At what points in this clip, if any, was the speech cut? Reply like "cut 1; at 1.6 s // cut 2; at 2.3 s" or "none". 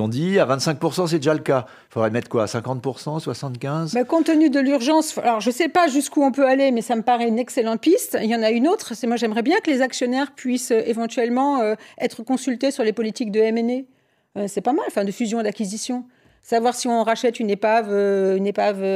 none